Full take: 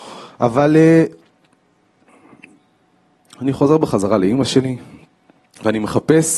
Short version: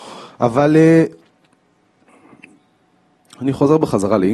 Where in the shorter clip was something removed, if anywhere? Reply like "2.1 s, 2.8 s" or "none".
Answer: none